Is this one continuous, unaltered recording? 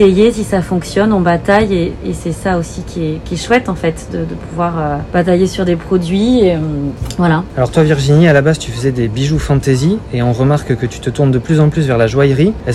yes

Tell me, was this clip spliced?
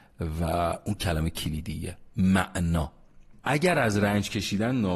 yes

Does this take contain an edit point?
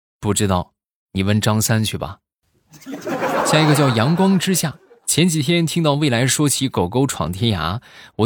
no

